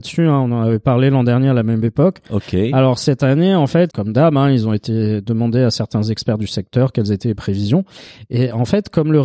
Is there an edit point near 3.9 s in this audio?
yes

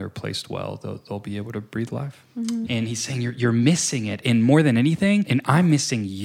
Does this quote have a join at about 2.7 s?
yes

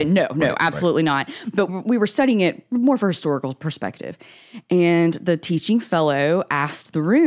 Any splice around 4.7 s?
no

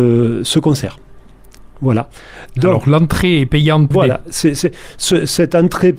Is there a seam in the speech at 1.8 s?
no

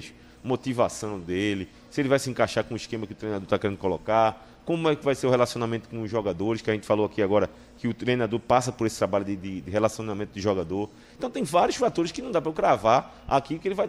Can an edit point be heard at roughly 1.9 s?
no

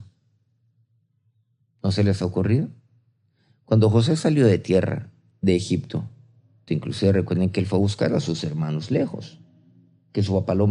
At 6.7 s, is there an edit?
yes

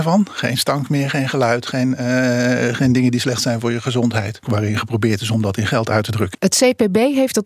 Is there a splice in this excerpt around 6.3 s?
yes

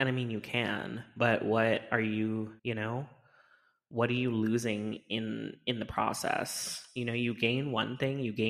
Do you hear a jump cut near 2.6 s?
yes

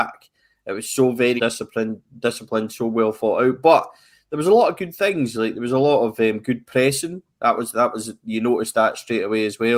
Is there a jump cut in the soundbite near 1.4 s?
yes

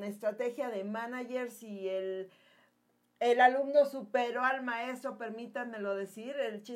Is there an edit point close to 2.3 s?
no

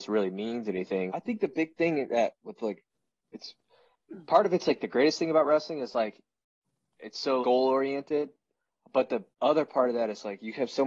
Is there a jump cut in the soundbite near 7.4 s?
yes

